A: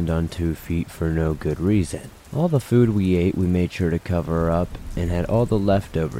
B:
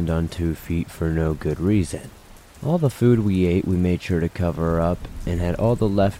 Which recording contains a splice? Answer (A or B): A